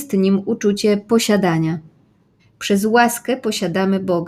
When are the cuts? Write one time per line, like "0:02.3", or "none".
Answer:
0:02.4